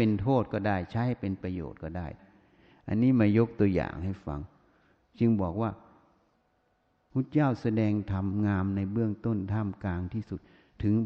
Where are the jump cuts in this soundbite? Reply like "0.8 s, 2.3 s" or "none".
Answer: none